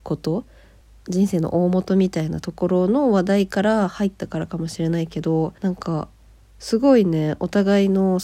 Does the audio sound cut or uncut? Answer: cut